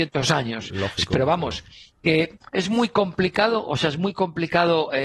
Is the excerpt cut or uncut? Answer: uncut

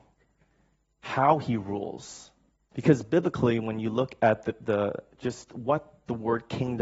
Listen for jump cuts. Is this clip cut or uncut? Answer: cut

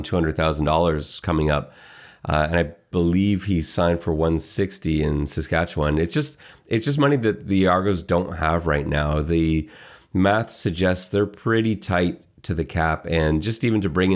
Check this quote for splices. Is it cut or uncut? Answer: uncut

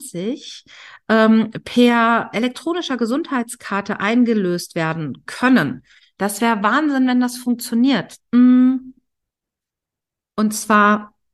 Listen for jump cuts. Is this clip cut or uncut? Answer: cut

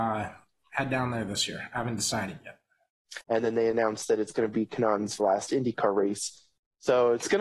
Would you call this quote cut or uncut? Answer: cut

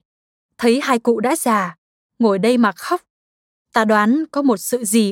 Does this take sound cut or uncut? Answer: uncut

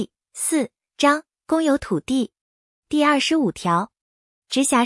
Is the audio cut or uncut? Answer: uncut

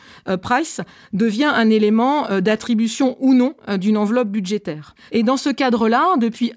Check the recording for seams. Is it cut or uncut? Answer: cut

